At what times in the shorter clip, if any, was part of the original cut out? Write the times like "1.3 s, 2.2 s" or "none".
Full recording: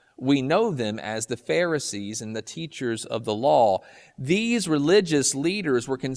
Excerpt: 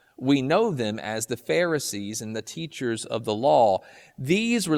none